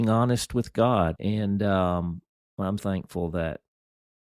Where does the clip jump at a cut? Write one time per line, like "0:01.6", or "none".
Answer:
0:01.2
0:02.8